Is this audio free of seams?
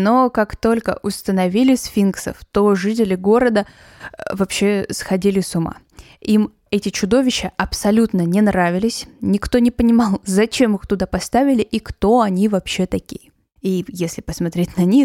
no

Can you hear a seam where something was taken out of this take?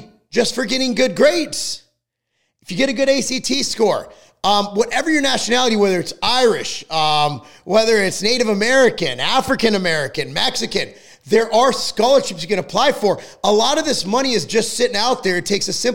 no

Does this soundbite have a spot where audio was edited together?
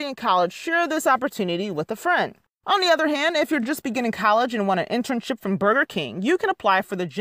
no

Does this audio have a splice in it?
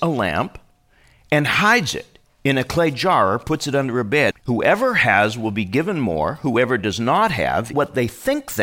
yes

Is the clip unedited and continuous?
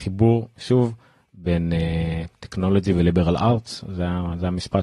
yes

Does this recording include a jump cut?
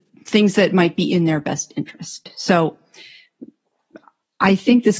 no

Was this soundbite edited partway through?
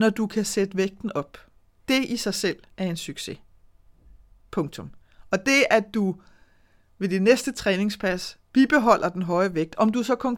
no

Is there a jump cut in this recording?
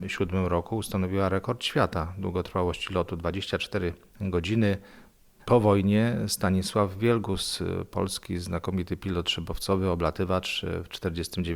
yes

